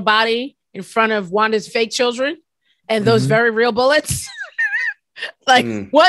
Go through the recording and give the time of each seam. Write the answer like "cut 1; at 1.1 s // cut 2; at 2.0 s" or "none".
cut 1; at 1.7 s